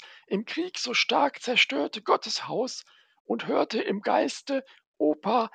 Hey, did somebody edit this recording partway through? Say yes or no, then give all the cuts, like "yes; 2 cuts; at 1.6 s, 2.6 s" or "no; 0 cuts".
no; 0 cuts